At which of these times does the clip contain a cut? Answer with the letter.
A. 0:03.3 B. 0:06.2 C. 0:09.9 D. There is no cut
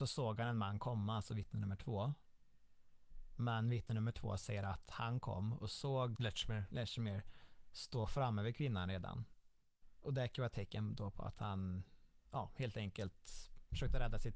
B